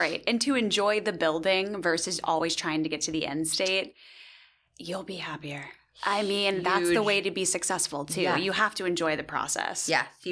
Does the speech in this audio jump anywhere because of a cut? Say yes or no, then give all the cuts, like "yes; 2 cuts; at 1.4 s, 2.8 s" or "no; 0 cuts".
no; 0 cuts